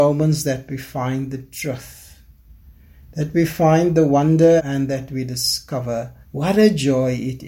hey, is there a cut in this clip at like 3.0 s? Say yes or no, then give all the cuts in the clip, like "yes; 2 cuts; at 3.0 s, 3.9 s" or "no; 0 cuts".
no; 2 cuts; at 4.6 s, 6.2 s